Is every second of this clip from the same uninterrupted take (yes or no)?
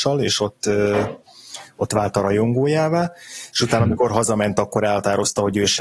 yes